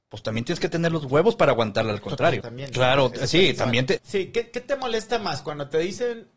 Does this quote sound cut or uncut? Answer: cut